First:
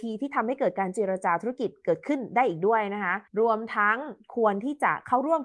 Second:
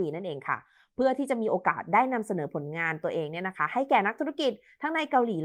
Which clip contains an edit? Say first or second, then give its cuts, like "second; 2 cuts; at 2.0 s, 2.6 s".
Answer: first; 1 cut; at 3.3 s